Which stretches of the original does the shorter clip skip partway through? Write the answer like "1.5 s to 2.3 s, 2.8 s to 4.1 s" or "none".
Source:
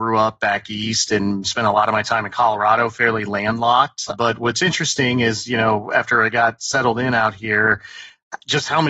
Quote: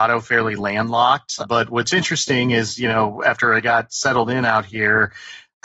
none